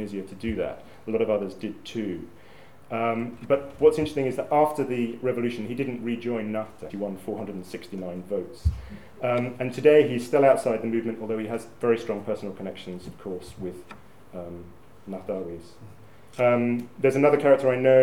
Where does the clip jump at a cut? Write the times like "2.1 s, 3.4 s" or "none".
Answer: 6.9 s